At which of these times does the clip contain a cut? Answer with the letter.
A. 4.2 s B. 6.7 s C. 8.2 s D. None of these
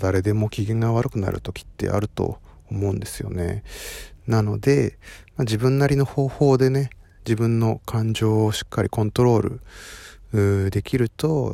A